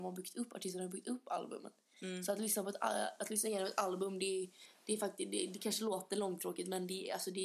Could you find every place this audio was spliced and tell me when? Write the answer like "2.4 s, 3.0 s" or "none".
none